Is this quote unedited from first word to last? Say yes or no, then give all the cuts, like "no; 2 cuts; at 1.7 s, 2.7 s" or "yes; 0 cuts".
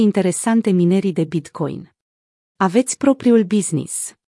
no; 1 cut; at 2.6 s